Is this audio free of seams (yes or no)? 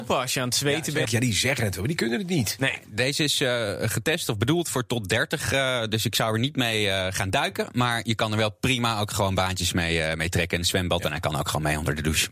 no